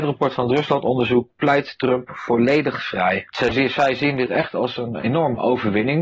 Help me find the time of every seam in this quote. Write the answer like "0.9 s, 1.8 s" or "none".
none